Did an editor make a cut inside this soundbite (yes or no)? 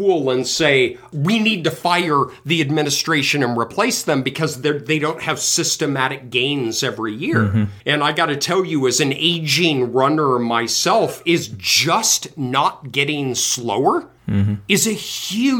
yes